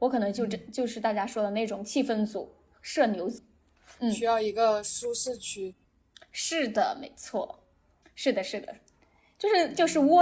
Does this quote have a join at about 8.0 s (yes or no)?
yes